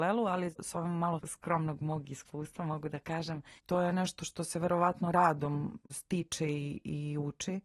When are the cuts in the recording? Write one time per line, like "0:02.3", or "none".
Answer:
0:03.6